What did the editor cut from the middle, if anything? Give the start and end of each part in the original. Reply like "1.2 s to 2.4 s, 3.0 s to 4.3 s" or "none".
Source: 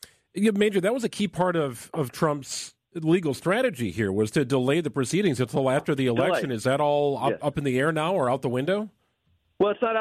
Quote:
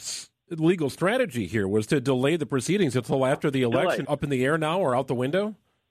6.5 s to 7.4 s